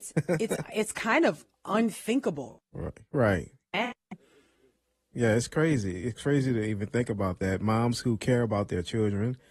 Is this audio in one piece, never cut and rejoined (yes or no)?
no